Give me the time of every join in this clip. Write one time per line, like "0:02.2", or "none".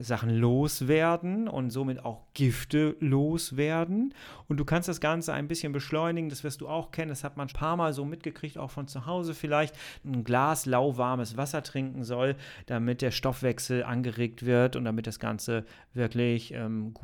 0:07.5
0:10.0